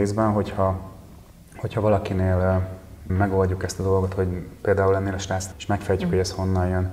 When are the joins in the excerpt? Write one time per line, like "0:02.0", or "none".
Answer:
0:03.1
0:05.5